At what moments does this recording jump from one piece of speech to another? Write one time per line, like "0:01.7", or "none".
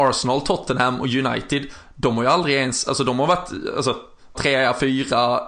0:04.3